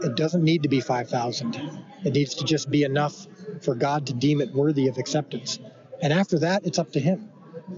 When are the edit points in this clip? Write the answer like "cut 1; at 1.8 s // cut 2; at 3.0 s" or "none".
none